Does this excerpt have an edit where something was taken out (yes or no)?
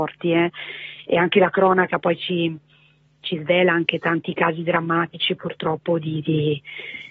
no